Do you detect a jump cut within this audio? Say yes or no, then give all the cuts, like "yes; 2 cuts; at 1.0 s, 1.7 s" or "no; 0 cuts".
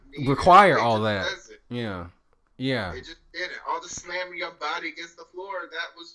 no; 0 cuts